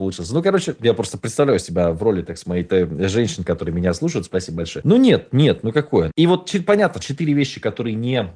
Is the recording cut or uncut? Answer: cut